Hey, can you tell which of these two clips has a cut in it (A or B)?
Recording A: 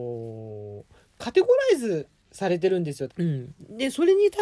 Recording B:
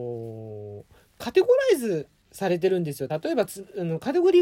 A